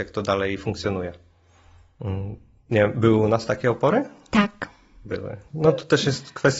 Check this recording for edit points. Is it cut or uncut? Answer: cut